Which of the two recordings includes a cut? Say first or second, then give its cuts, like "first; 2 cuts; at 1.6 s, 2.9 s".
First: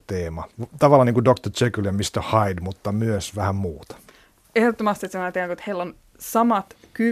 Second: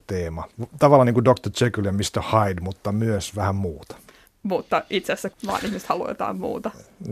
second; 2 cuts; at 4.2 s, 5.3 s